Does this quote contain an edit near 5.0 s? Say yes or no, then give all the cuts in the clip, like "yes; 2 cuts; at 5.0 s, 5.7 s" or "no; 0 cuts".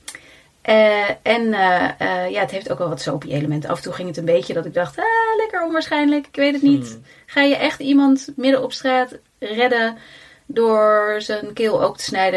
no; 0 cuts